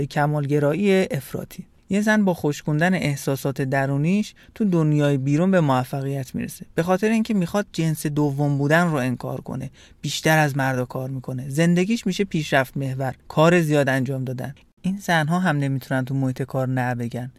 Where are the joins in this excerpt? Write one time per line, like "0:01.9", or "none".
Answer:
none